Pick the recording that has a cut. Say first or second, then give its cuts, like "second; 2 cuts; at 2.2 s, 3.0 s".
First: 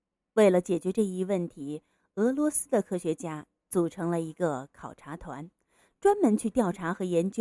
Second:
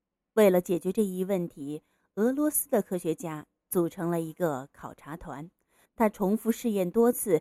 second; 1 cut; at 5.9 s